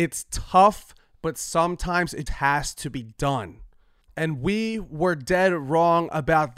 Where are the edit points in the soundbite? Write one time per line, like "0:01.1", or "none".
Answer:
0:02.3